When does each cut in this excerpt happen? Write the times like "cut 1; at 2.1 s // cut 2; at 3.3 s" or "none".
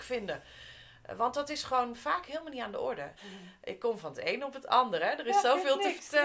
cut 1; at 3.2 s